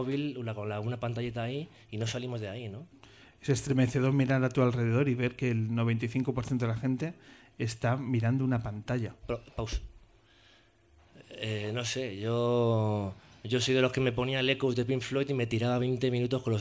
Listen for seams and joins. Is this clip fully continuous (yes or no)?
no